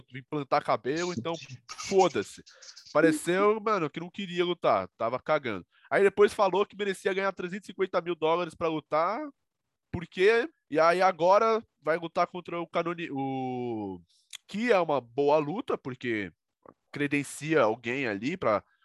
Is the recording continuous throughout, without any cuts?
no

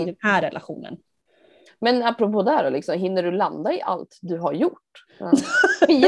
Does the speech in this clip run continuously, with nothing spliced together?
no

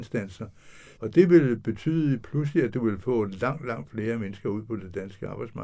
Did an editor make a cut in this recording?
yes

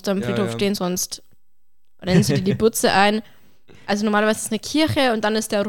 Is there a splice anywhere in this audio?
no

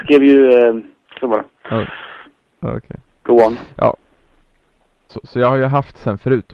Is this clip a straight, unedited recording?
no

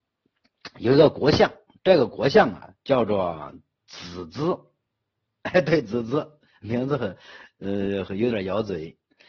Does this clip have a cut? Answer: no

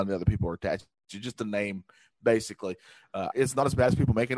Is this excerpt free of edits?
no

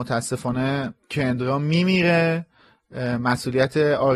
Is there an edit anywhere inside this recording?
yes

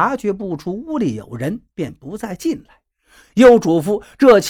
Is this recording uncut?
no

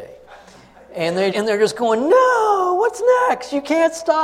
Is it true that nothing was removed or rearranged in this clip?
no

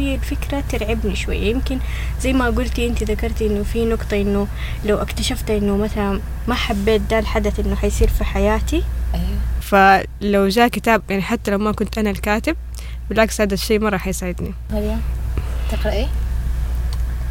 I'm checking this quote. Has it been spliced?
yes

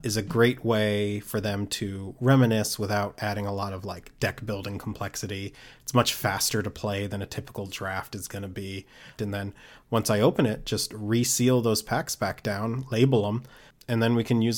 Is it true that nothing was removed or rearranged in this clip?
no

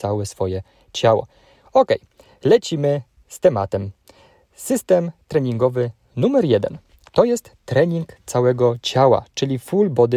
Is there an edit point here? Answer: yes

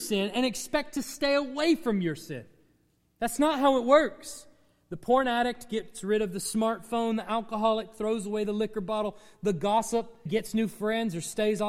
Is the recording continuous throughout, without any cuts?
no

